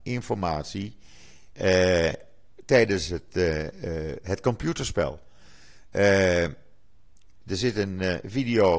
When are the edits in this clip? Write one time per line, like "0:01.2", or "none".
0:07.4